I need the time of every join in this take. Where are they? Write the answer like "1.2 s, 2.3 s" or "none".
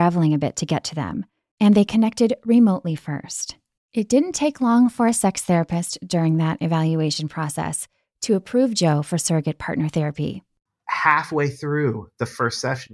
3.8 s